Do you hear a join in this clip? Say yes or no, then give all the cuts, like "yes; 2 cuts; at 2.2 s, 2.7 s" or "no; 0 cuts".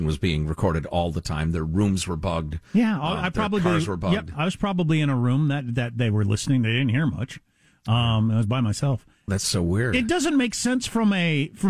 yes; 1 cut; at 9.3 s